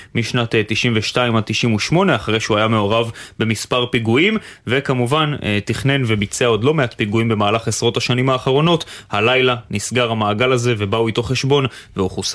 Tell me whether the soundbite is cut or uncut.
uncut